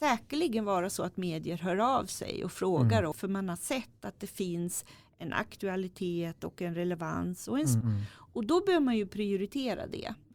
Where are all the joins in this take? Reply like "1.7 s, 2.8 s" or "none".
3.1 s, 7.8 s